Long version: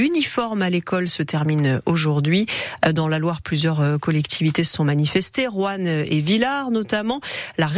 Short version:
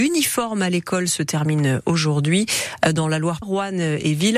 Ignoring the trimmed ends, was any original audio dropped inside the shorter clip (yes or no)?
yes